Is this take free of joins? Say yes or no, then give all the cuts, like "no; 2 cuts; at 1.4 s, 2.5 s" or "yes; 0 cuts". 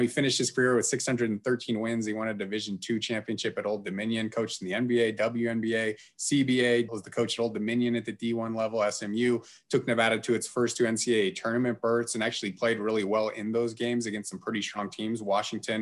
no; 1 cut; at 6.9 s